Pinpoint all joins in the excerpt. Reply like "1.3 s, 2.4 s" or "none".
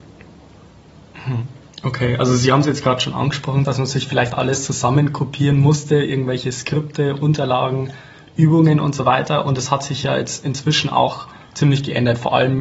3.6 s